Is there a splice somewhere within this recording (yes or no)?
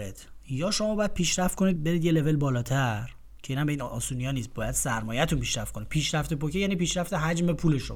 yes